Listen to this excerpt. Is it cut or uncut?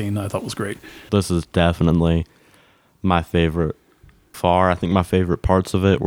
cut